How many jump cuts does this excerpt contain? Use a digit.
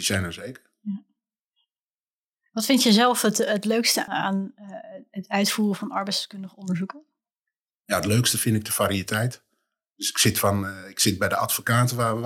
1